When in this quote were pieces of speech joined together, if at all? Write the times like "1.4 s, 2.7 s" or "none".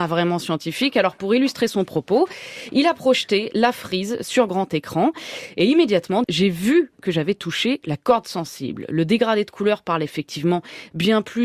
6.2 s